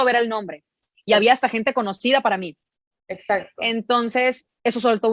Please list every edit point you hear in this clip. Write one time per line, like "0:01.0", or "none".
0:02.9